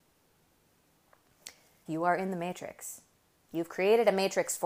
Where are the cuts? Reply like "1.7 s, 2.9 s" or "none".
1.9 s